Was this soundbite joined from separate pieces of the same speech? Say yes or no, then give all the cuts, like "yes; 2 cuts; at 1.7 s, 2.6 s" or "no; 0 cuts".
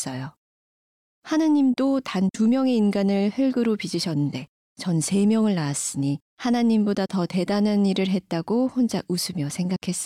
yes; 2 cuts; at 1.1 s, 6.3 s